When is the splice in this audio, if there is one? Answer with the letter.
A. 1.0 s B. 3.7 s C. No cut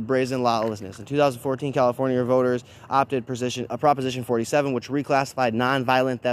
B